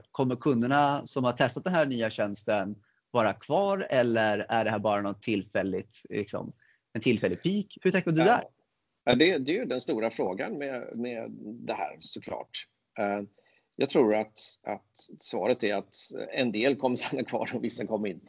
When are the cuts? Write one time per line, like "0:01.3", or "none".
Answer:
none